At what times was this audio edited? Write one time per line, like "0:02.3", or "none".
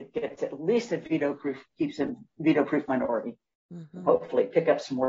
none